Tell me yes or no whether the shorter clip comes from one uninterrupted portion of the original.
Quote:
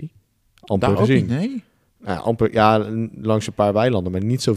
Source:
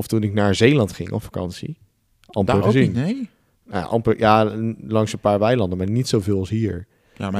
yes